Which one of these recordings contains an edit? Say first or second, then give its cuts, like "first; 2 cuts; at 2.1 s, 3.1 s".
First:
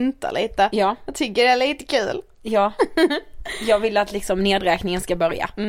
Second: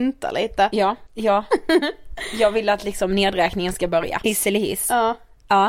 second; 2 cuts; at 1.1 s, 4.2 s